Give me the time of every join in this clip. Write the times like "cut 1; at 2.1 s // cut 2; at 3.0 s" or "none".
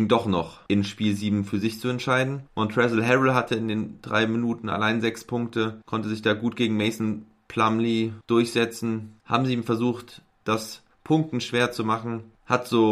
cut 1; at 2.4 s // cut 2; at 9.2 s // cut 3; at 10.4 s